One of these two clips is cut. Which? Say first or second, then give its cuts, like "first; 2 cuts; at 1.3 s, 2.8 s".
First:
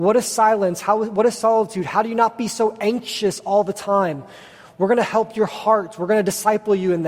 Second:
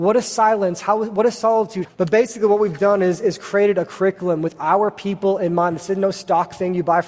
second; 1 cut; at 1.8 s